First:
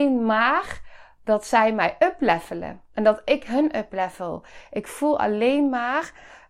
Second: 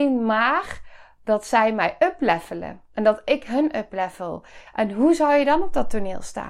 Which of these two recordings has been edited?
second; 1 cut; at 4.7 s

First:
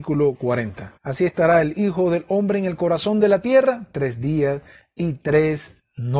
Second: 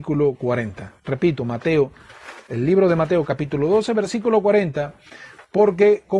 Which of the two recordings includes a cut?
first; 1 cut; at 1.0 s

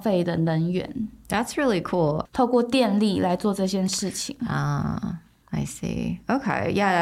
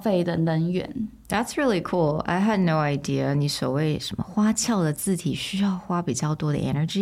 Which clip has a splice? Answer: first; 1 cut; at 2.3 s

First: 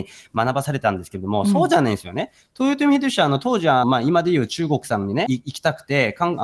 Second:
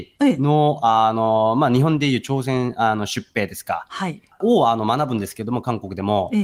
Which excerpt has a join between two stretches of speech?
first; 2 cuts; at 3.8 s, 5.3 s

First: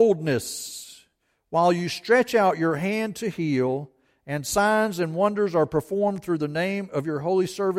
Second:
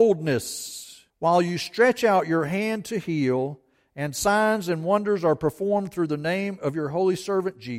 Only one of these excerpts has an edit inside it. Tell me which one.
second; 1 cut; at 1.1 s

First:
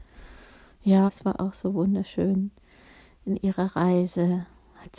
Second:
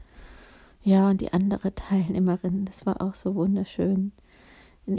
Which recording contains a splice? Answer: first; 1 cut; at 1.1 s

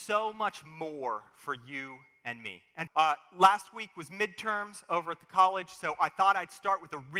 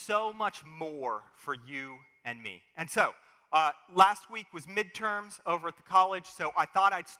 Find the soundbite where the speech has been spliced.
first; 1 cut; at 2.9 s

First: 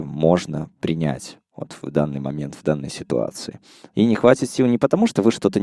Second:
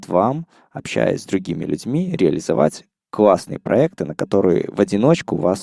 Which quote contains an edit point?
first; 1 cut; at 3.9 s

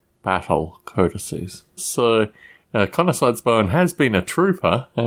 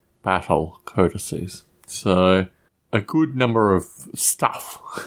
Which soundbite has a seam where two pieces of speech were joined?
first; 1 cut; at 1.8 s

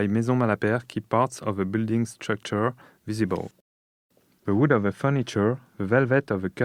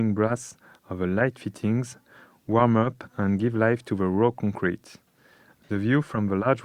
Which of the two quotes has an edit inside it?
second; 1 cut; at 5.5 s

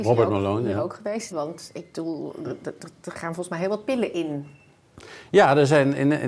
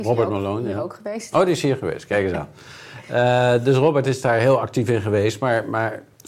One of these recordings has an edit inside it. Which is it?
first; 1 cut; at 1.3 s

